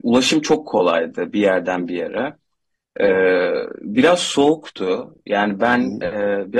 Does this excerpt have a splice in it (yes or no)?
no